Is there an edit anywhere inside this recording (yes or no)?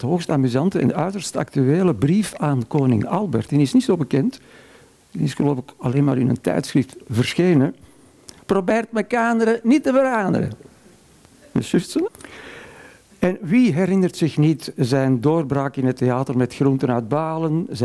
yes